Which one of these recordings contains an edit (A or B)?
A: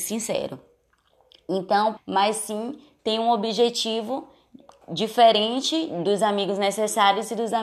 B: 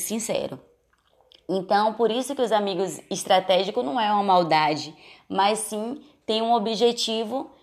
A